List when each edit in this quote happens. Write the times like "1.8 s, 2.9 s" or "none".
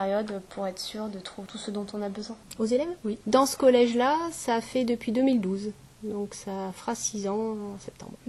3.2 s